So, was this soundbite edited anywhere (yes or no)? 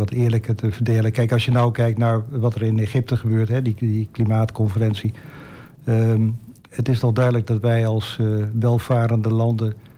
no